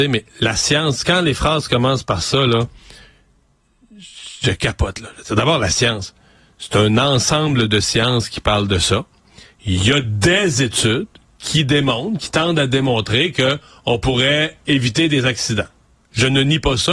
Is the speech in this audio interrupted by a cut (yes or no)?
no